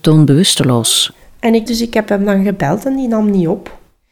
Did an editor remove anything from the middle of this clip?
yes; 1 cut; at 1.7 s

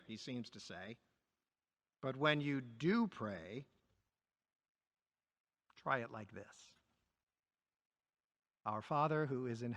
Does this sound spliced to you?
no; 0 cuts

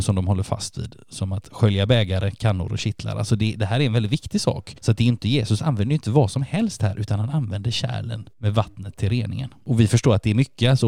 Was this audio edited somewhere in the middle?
no; 0 cuts

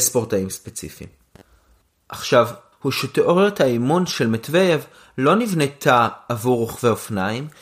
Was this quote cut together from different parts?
yes; 1 cut; at 2.7 s

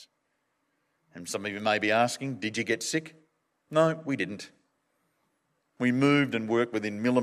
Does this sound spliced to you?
no; 0 cuts

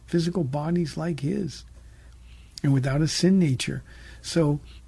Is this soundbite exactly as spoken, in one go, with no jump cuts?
yes; 0 cuts

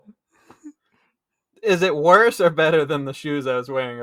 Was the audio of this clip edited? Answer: no; 0 cuts

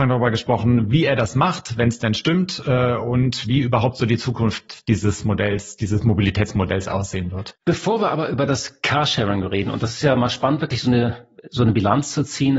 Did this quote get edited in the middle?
no; 0 cuts

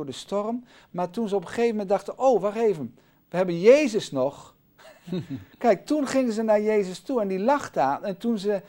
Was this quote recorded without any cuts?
yes; 0 cuts

